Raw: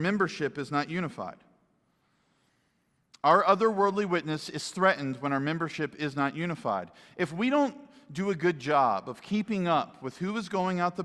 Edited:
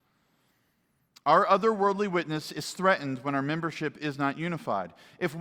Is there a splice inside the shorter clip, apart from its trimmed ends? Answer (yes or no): no